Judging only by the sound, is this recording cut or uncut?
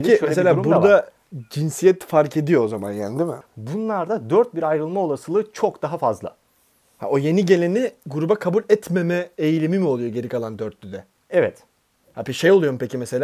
cut